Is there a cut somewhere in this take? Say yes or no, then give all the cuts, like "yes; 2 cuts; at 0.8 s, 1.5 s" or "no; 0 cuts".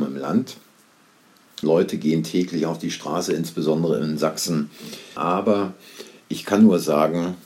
yes; 2 cuts; at 1.6 s, 5.2 s